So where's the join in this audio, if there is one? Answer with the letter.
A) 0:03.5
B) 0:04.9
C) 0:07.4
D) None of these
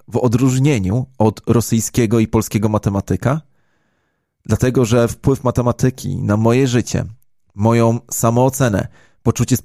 D